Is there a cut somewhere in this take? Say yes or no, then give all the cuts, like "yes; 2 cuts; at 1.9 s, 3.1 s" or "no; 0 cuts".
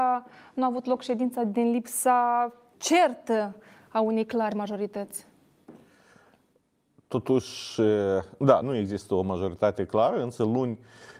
yes; 2 cuts; at 2.7 s, 8.6 s